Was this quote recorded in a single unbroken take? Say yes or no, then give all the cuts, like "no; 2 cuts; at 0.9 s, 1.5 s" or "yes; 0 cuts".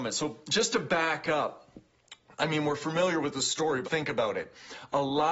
no; 1 cut; at 3.8 s